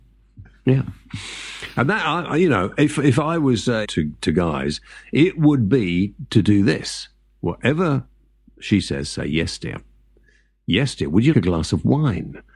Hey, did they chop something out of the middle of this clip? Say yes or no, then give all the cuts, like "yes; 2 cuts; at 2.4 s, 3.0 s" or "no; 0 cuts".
yes; 2 cuts; at 3.8 s, 11.3 s